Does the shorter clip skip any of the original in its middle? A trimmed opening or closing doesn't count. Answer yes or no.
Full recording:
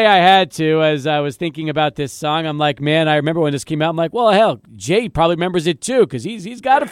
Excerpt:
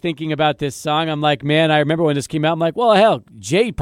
no